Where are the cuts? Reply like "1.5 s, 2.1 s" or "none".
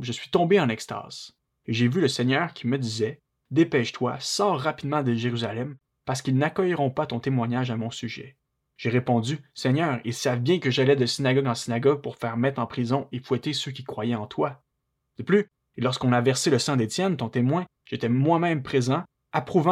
none

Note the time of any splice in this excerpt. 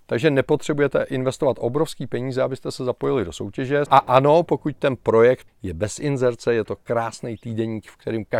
3.9 s, 5.5 s

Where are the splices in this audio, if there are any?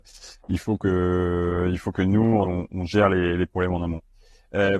2.4 s

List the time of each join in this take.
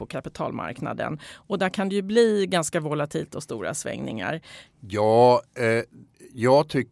4.7 s

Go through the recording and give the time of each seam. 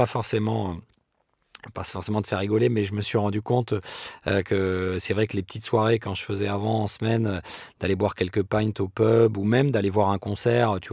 none

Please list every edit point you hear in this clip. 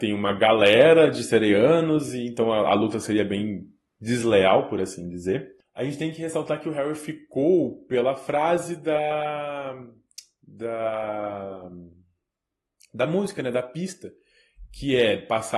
none

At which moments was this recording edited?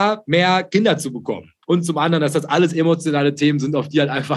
1.6 s

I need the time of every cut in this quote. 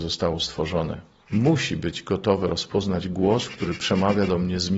1.3 s

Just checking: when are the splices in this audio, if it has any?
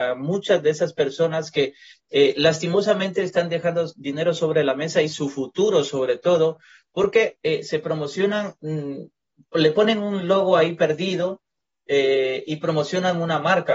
none

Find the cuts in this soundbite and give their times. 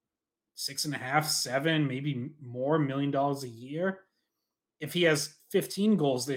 none

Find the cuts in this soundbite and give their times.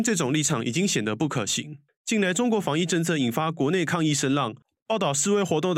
none

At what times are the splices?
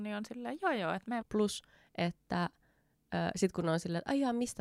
1.2 s

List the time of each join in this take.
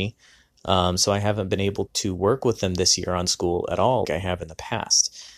1.9 s, 4.0 s

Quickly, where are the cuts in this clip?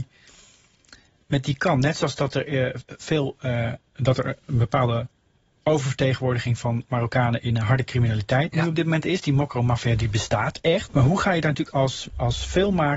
10.9 s

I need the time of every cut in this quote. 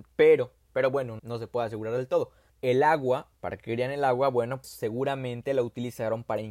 1.2 s, 2.5 s, 4.6 s

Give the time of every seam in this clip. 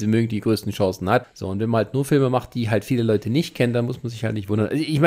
1.2 s

